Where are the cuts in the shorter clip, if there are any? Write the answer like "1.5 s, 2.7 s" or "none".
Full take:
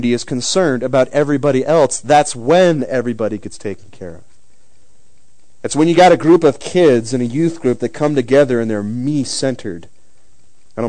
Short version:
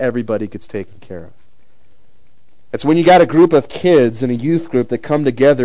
none